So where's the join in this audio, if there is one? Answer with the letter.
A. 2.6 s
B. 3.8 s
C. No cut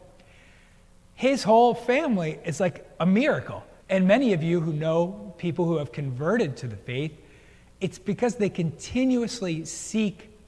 B